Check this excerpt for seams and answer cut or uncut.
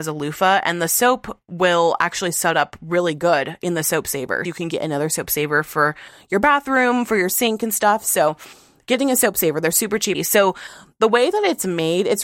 cut